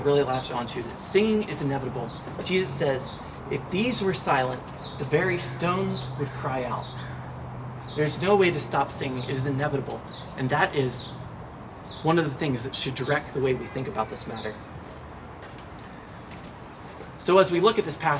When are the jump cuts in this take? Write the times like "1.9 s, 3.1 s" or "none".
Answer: none